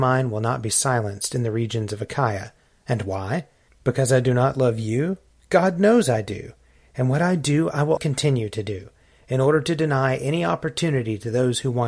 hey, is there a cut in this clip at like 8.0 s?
yes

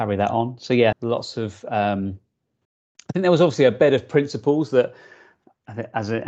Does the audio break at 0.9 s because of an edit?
yes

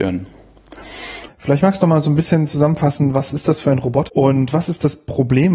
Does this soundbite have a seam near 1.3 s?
yes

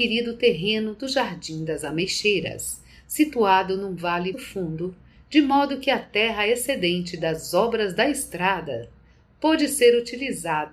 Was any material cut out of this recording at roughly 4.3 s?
yes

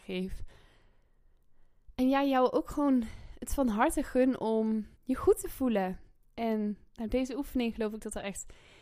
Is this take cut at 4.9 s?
yes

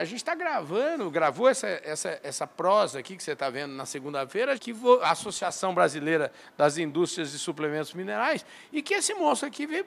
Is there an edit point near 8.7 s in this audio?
no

